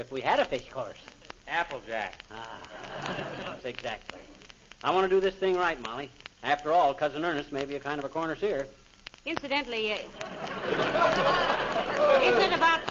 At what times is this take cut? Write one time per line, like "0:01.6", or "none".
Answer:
0:03.6